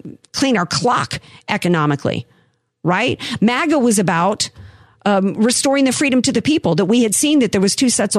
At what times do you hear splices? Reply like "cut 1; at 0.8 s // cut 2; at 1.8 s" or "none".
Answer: none